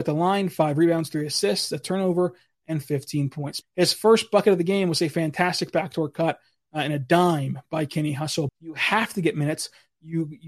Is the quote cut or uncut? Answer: cut